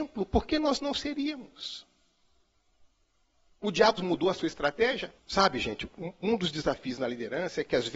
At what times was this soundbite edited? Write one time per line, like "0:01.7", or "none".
0:04.0
0:05.2